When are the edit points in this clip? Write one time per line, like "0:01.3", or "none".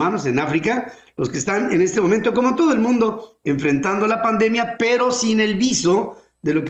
none